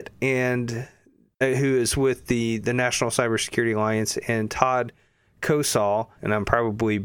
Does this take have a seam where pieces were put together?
yes; 1 cut; at 6.2 s

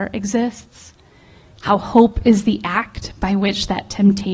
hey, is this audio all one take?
yes; 0 cuts

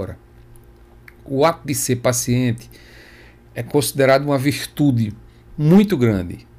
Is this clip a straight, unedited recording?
yes; 0 cuts

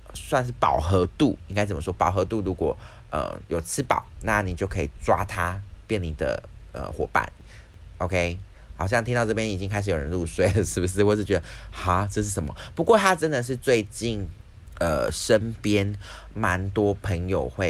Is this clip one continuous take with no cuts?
yes; 0 cuts

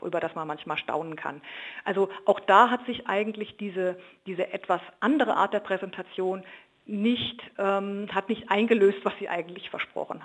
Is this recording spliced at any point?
no; 0 cuts

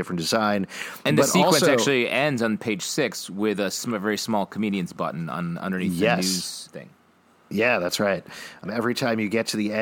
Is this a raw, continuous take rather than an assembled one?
no; 2 cuts; at 6.7 s, 8.6 s

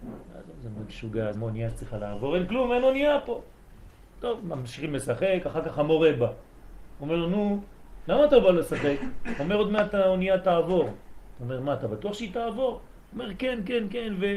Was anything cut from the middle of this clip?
yes; 1 cut; at 1.3 s

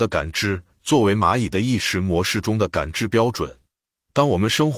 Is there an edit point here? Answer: no; 0 cuts

